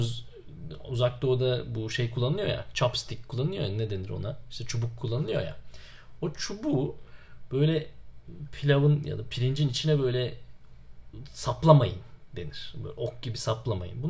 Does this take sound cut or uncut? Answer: uncut